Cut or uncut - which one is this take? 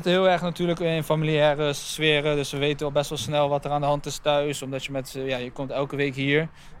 uncut